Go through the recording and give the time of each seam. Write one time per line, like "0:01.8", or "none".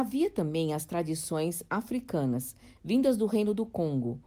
none